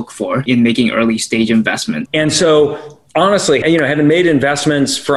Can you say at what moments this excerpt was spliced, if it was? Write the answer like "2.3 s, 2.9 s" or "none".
2.1 s, 3.6 s